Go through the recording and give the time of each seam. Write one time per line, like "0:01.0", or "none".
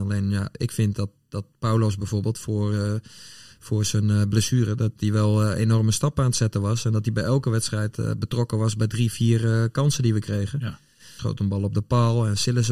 0:11.2